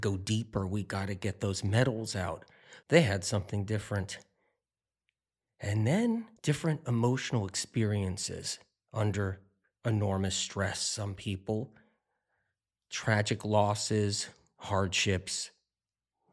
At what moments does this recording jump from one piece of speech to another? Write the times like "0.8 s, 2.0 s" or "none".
2.8 s, 6.4 s